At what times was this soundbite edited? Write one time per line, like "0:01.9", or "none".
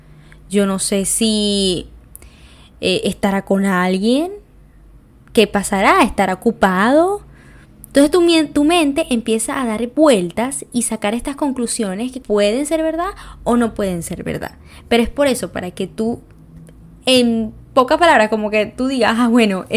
0:12.2